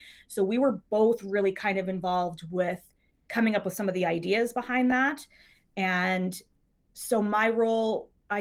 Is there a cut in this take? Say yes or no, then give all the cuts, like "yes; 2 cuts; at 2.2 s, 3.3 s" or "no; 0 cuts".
no; 0 cuts